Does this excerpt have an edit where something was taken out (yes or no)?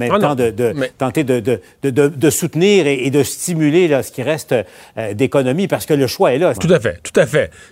yes